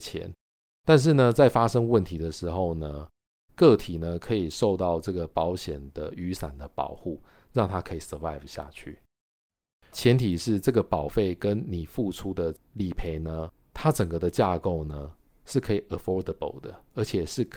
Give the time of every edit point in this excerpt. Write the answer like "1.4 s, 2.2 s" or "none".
none